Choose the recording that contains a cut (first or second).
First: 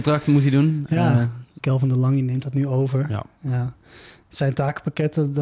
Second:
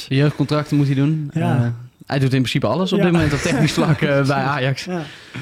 first